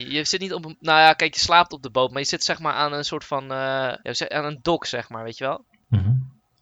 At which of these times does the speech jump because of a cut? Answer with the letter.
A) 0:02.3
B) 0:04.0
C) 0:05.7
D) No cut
B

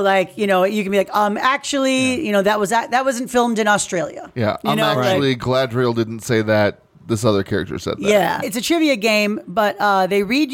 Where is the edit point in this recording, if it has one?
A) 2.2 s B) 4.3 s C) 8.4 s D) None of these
C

